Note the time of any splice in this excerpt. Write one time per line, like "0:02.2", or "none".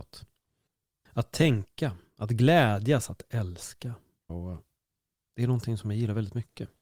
0:01.1
0:04.3